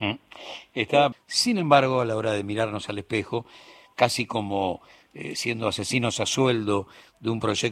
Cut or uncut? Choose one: cut